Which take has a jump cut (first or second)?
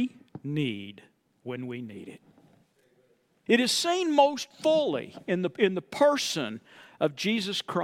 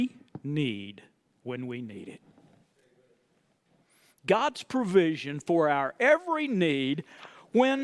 first